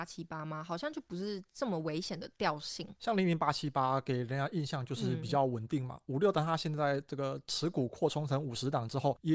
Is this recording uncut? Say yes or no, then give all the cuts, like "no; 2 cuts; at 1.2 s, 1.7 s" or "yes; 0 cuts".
no; 1 cut; at 6.3 s